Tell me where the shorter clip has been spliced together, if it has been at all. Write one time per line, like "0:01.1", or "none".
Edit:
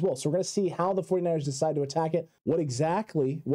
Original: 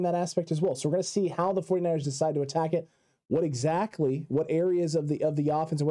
0:02.4